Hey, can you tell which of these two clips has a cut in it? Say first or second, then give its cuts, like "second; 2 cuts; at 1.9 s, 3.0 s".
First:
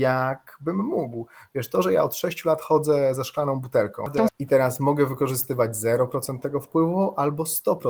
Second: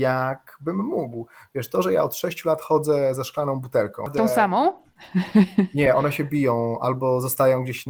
first; 1 cut; at 4.3 s